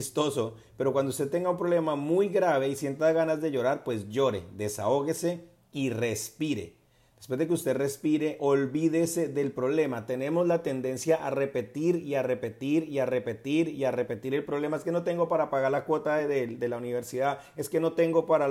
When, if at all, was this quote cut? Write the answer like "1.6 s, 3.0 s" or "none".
none